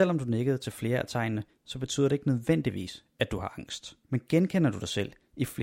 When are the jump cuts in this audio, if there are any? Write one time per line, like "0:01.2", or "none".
0:04.0